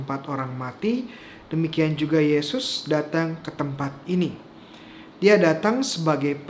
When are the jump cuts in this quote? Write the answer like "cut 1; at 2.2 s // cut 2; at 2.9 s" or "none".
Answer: cut 1; at 5.1 s